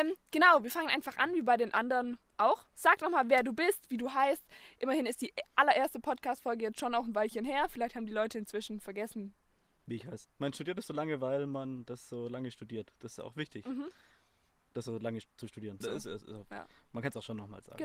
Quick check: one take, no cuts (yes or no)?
no